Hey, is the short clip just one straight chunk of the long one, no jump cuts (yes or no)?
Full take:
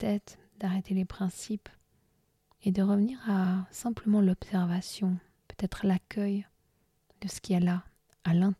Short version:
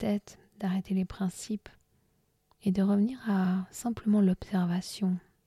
yes